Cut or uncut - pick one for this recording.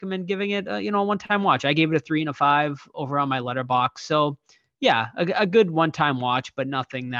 uncut